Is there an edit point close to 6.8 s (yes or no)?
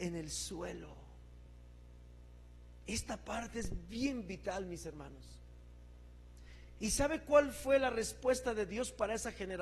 yes